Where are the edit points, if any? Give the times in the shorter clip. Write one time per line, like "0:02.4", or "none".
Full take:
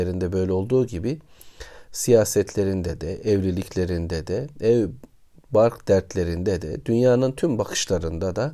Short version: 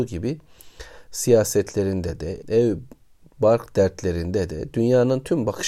0:02.4